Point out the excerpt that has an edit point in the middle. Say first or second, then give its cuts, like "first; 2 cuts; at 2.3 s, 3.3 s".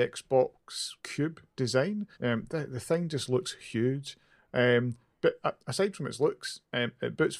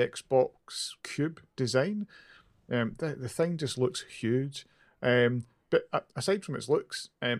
first; 1 cut; at 2.1 s